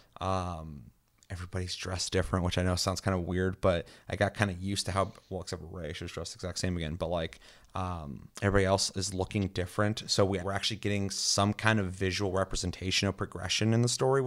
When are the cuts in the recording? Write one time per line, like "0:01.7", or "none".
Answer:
0:08.3
0:10.4